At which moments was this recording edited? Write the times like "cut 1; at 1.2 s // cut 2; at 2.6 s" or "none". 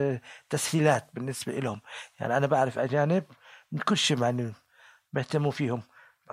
none